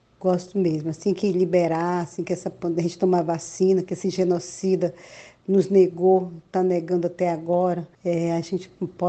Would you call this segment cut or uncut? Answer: cut